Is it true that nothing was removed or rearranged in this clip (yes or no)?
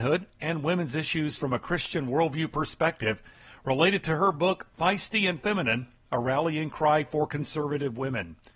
yes